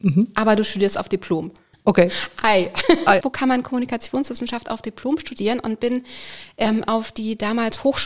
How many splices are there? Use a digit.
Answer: 2